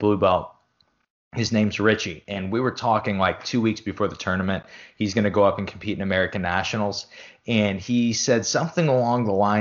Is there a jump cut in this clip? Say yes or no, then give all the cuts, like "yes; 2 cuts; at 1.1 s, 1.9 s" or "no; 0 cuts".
no; 0 cuts